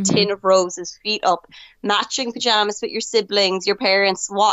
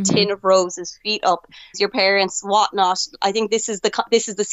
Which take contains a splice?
second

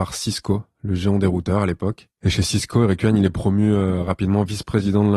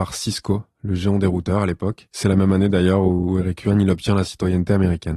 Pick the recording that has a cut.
first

